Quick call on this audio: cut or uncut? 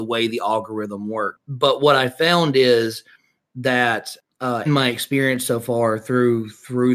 cut